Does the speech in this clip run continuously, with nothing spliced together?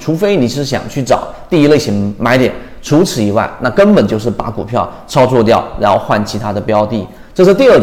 yes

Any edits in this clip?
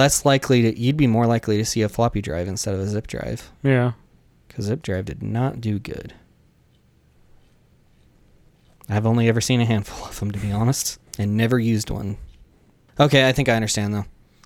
yes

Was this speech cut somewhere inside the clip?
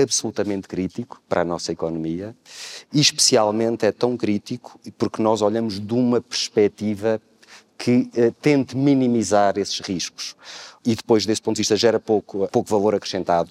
yes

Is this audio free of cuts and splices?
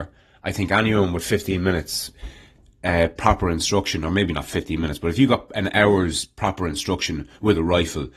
yes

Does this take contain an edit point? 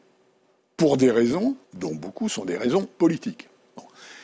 yes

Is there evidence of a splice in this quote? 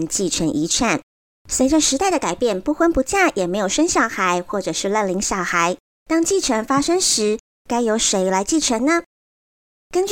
no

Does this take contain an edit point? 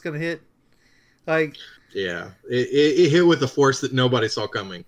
yes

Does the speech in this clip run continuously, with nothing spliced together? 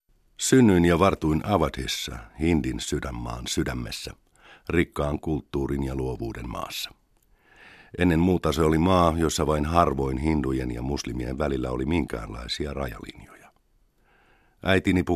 yes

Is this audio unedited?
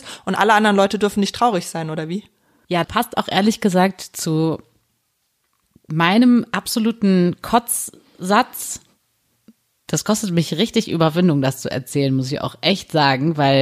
no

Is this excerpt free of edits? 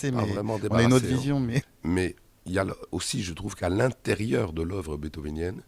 no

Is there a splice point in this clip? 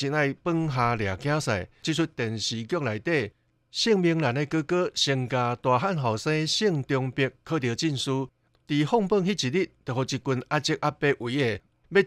yes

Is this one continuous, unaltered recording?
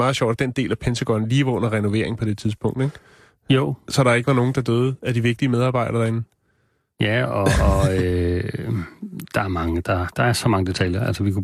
yes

